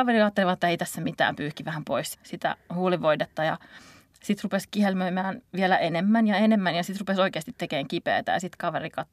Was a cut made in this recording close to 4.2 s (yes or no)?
no